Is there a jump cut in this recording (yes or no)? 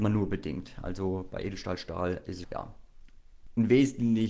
yes